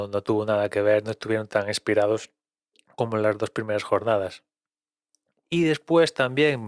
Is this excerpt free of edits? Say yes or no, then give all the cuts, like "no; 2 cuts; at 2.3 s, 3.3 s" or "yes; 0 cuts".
yes; 0 cuts